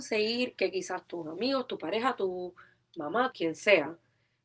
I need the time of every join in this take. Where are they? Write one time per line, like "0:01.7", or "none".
0:03.3